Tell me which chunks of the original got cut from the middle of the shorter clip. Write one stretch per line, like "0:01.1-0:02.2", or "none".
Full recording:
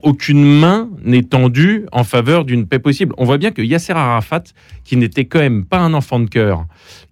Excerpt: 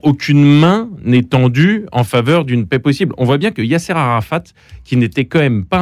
none